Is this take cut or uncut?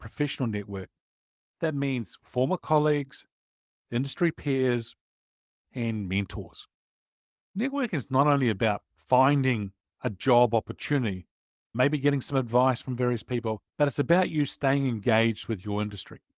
cut